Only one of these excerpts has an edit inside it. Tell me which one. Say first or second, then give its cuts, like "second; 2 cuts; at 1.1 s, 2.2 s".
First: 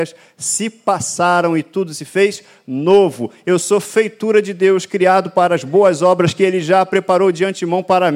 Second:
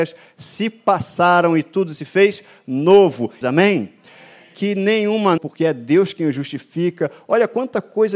second; 2 cuts; at 3.4 s, 5.4 s